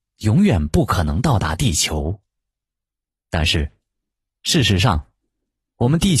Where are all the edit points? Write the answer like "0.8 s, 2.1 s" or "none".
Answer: none